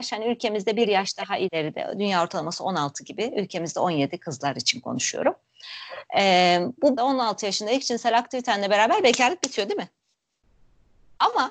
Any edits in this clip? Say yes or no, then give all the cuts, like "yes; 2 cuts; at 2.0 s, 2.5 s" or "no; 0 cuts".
yes; 1 cut; at 7.0 s